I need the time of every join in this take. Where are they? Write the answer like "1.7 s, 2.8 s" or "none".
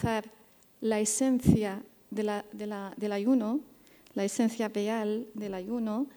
none

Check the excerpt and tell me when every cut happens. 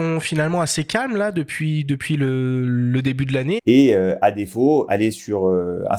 3.6 s, 4.9 s

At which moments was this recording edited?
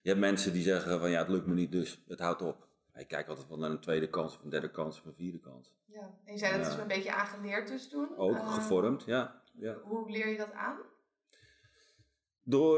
none

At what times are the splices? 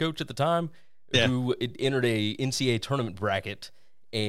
none

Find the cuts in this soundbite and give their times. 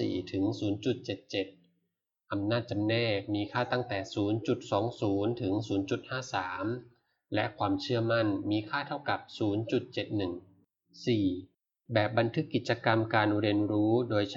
none

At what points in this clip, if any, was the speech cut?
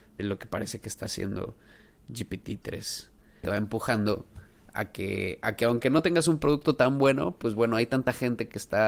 3.4 s

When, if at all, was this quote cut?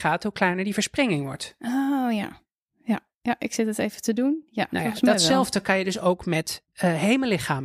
none

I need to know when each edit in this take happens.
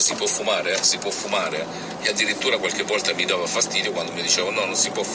none

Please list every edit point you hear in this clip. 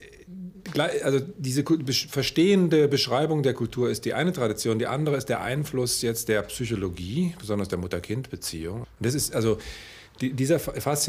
8.8 s

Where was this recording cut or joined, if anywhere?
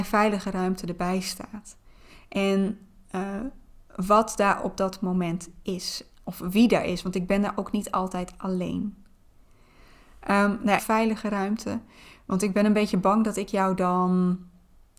10.8 s

